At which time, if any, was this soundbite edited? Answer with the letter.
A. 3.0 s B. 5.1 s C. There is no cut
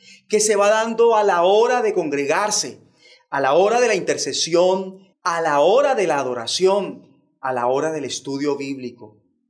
B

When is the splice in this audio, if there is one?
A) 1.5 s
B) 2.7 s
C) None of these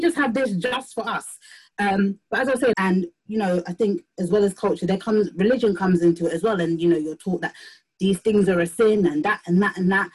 B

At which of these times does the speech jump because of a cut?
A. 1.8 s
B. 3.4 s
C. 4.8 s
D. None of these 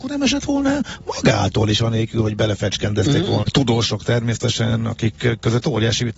B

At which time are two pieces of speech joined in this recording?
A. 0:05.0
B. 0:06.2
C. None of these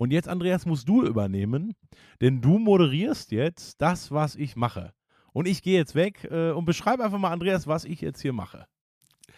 C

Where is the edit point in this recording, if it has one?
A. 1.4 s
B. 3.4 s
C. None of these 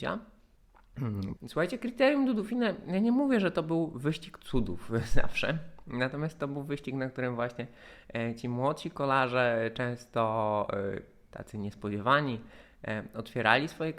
A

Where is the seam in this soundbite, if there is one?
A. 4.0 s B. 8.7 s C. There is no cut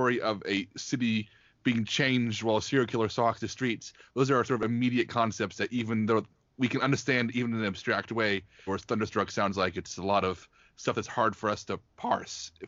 B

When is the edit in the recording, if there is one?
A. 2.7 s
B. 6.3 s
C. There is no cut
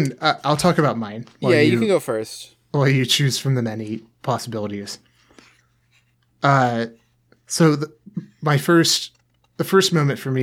C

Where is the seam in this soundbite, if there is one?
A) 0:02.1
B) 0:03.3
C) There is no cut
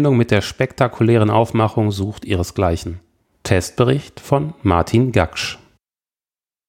B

